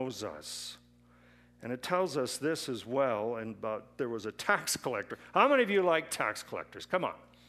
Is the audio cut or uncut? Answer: uncut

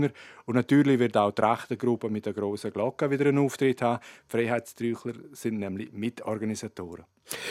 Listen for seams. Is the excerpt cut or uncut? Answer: uncut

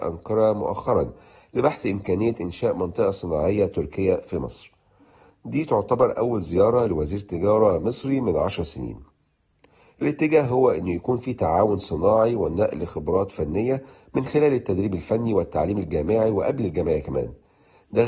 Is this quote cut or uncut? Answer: uncut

